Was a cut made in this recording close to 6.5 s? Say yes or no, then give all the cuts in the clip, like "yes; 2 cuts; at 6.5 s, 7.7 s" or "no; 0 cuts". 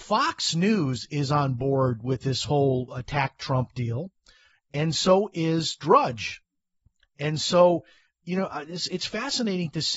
no; 0 cuts